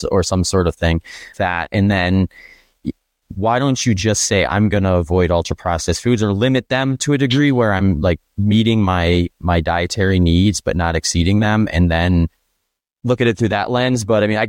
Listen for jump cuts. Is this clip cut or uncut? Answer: cut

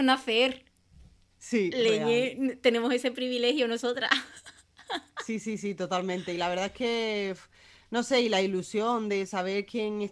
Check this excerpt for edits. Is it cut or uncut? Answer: uncut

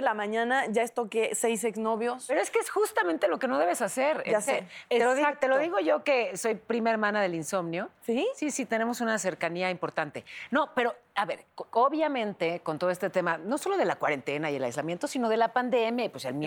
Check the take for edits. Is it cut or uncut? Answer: uncut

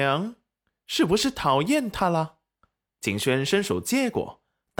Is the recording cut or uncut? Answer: cut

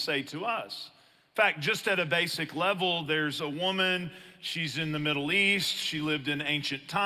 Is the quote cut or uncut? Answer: uncut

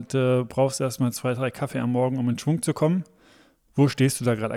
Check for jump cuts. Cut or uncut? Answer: uncut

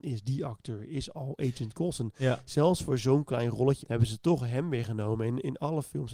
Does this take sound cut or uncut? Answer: cut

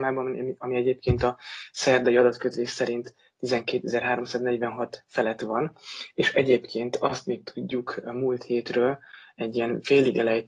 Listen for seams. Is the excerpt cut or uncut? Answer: uncut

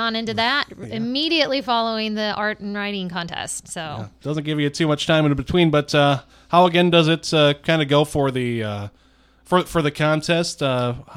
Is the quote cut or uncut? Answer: uncut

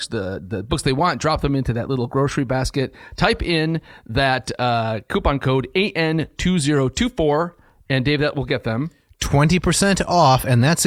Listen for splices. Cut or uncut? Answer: uncut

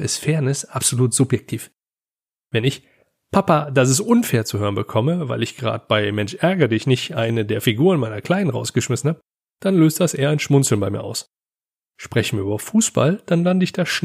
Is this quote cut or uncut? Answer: uncut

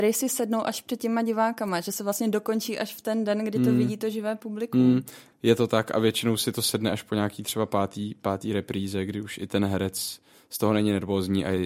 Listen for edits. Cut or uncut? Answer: uncut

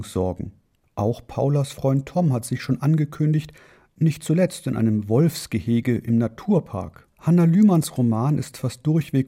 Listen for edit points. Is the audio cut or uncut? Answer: cut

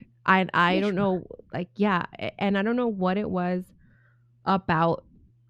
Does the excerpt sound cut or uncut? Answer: uncut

